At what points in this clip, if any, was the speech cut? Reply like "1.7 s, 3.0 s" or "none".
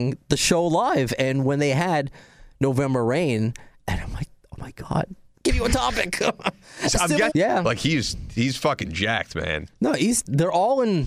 5.3 s, 7.3 s